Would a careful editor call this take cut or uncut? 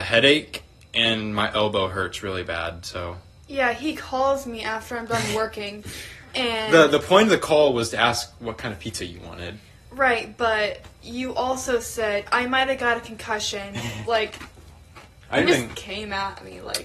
cut